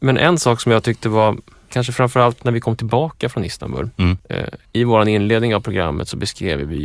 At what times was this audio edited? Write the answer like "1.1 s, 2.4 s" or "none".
1.7 s